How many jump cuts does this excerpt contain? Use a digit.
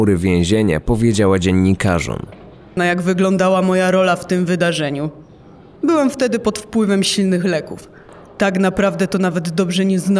1